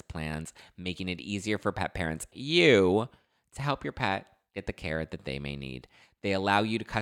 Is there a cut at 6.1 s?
no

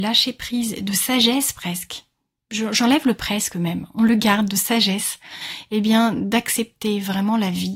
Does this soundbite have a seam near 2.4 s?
no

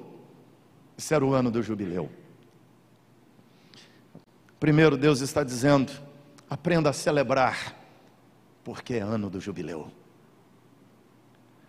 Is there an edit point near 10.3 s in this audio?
no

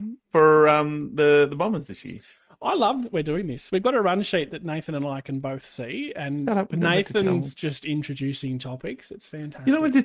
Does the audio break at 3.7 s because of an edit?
no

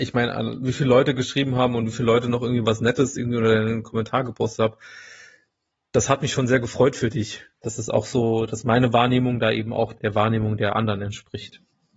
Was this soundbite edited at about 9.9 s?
yes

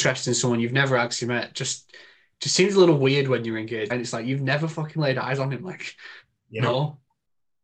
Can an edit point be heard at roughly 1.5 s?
no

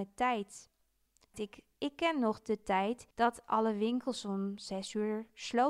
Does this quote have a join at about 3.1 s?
yes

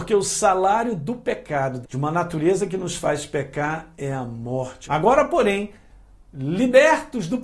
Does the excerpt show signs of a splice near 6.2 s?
no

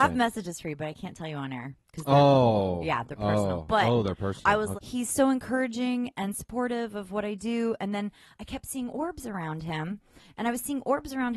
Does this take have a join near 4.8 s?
yes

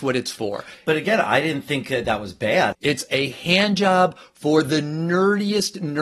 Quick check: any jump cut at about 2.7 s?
yes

